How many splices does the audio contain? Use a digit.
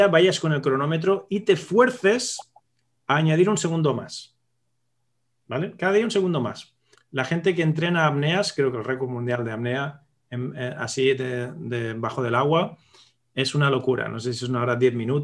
1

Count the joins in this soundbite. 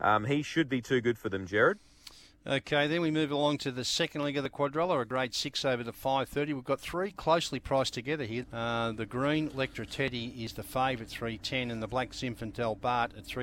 1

